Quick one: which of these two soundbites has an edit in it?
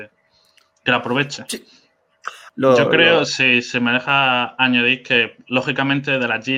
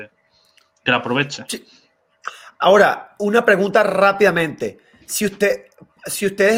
first; 1 cut; at 2.5 s

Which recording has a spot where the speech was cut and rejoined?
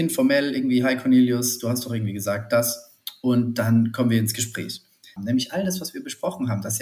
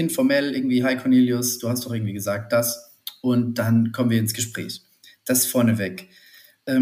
first; 1 cut; at 5.2 s

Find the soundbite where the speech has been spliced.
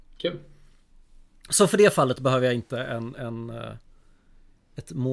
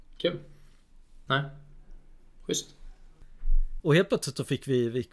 second; 2 cuts; at 1.3 s, 3.8 s

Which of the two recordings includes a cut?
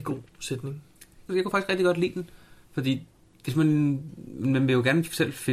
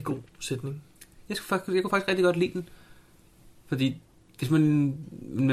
first; 2 cuts; at 1.3 s, 2.6 s

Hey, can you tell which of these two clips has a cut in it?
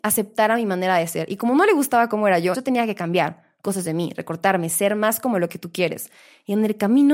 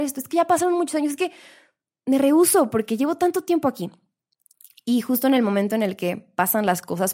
first; 1 cut; at 2.5 s

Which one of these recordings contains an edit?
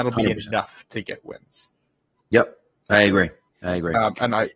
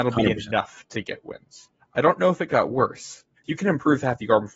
second; 2 cuts; at 1.8 s, 3.4 s

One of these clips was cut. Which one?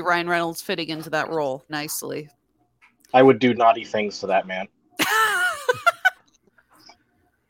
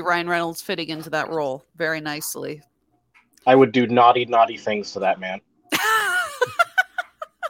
first; 3 cuts; at 1.7 s, 3.5 s, 6.2 s

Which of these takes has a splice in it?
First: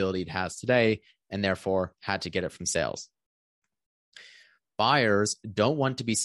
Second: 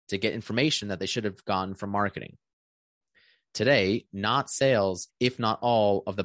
second; 2 cuts; at 4.1 s, 5.1 s

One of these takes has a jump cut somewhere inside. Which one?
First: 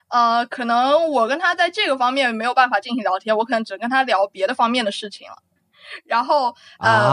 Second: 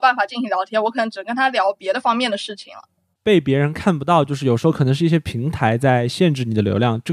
first; 1 cut; at 5.6 s

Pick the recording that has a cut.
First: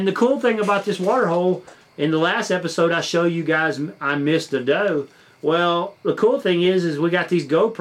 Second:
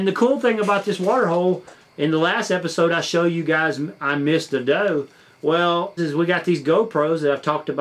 second; 1 cut; at 6.0 s

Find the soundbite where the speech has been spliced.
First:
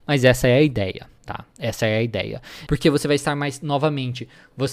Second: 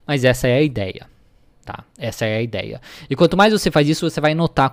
first; 2 cuts; at 1.2 s, 2.7 s

